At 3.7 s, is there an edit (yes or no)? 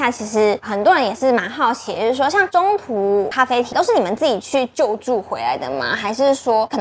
yes